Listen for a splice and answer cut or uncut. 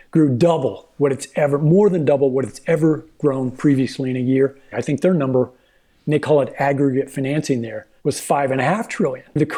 cut